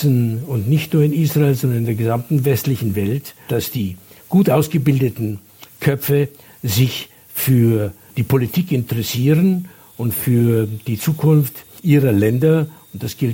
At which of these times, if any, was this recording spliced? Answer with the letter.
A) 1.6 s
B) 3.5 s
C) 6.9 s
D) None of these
B